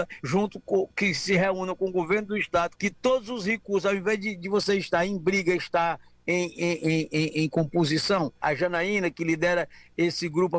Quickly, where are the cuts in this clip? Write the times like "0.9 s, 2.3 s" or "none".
2.8 s